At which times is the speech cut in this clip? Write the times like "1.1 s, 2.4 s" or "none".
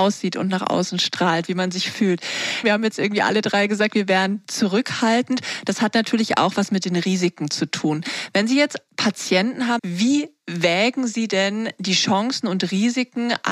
2.6 s, 9.8 s